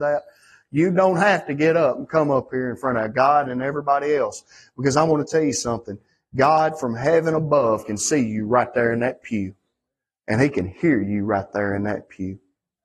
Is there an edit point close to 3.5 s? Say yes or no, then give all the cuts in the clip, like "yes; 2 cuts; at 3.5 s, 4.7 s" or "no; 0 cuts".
yes; 1 cut; at 3.5 s